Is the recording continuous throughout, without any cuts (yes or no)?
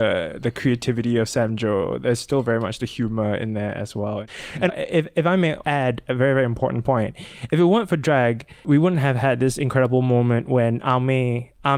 no